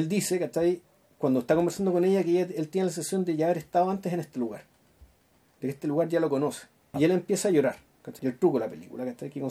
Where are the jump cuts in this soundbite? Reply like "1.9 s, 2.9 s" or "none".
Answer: 6.9 s, 8.2 s